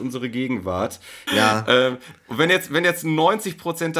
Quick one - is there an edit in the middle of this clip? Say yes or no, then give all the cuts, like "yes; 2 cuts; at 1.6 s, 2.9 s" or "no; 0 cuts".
yes; 1 cut; at 1.3 s